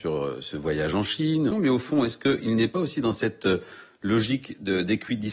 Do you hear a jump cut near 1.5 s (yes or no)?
yes